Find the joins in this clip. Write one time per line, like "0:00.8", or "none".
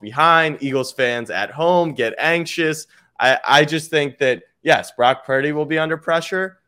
none